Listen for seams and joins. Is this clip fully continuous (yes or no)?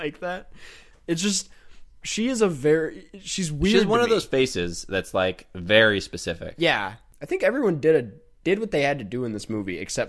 no